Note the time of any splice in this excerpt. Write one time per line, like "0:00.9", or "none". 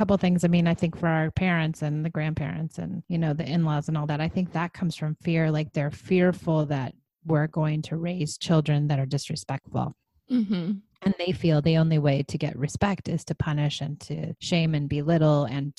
none